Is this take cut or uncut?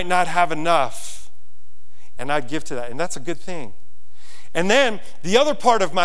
cut